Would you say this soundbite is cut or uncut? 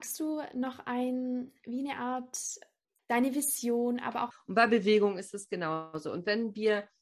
cut